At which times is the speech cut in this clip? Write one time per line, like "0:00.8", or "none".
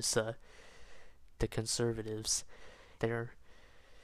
0:01.4
0:03.0